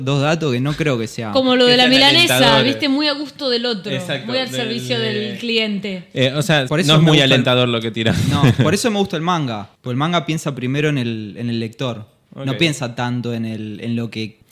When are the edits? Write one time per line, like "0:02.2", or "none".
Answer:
0:06.7